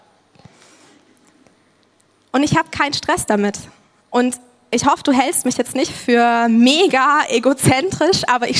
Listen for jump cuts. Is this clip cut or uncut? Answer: cut